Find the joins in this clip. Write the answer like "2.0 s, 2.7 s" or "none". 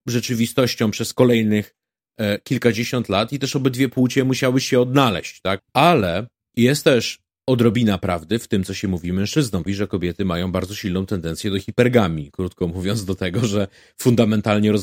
5.6 s, 9.7 s